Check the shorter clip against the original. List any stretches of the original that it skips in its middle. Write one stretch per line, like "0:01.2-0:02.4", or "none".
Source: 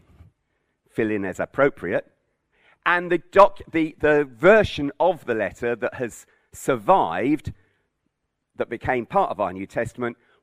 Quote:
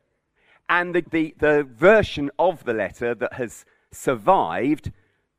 0:03.2-0:03.6